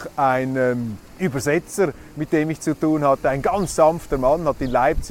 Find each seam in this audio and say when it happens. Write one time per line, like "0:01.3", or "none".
0:01.1